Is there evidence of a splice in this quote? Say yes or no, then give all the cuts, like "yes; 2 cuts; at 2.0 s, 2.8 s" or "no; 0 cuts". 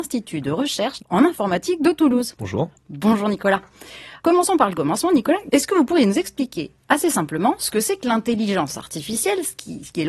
no; 0 cuts